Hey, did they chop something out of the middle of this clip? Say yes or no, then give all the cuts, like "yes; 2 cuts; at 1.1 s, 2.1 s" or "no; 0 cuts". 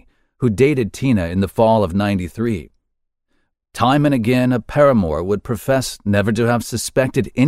yes; 1 cut; at 3.5 s